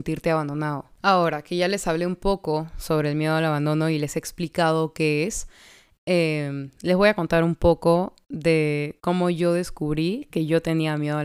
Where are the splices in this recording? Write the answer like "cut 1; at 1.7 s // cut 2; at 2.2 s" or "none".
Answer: none